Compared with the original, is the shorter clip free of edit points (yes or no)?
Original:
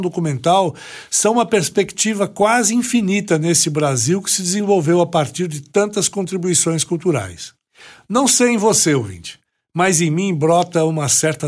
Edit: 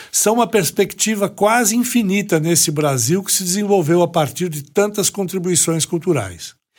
yes